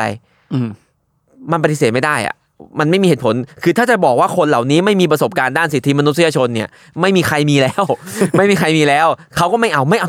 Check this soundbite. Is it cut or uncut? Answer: uncut